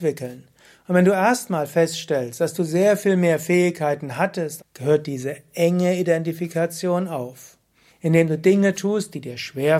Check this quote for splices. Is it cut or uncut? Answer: cut